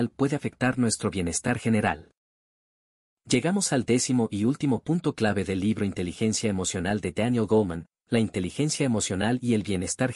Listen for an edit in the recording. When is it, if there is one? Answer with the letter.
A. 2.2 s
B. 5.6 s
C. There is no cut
C